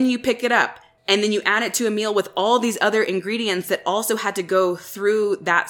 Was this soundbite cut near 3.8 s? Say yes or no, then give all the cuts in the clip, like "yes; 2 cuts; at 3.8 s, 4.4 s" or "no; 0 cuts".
no; 1 cut; at 1.0 s